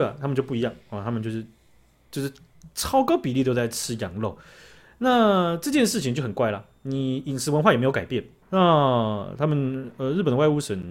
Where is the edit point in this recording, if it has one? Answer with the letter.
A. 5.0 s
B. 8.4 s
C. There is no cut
B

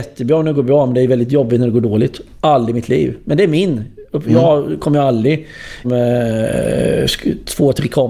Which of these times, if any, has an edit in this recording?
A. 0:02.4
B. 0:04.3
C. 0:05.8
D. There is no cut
C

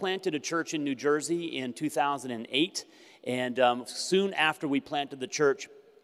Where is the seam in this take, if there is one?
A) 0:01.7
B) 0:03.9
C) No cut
C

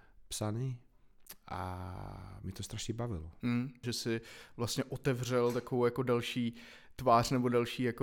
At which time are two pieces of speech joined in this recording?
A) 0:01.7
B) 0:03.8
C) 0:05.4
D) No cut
B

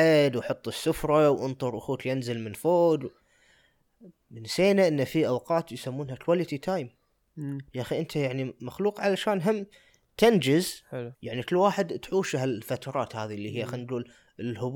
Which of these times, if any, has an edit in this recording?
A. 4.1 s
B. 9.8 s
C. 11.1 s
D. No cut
C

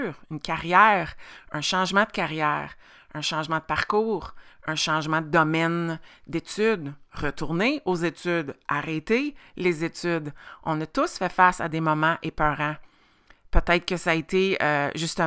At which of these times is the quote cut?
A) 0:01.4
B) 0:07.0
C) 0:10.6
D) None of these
D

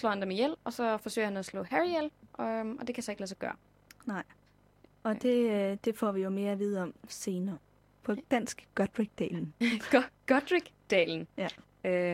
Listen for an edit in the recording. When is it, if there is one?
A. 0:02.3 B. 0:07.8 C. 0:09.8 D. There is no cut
B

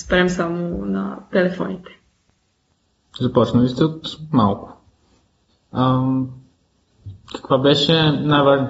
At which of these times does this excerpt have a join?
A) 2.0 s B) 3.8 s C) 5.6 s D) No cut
D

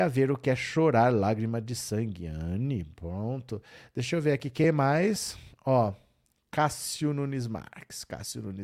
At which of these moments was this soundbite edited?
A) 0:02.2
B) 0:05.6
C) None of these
C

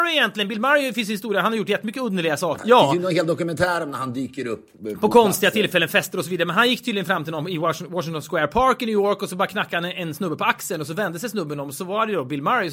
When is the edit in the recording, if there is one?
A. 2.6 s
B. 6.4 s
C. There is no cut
A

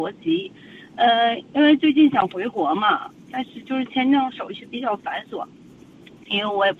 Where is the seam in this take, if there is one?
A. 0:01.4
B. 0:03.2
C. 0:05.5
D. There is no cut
D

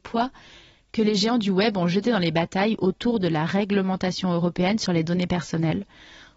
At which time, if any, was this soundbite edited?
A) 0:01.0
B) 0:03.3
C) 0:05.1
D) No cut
D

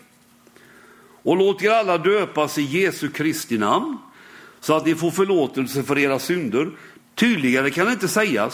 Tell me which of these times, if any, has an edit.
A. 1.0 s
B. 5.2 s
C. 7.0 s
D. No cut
C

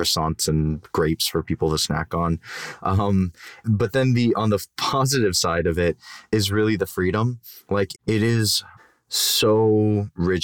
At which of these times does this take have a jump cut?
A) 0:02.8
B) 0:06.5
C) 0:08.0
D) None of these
C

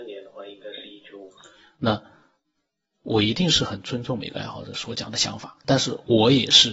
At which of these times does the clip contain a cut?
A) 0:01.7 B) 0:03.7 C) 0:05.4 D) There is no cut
A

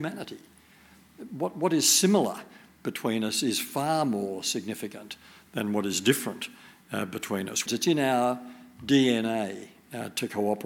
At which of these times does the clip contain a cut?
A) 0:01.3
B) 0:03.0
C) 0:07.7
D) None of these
C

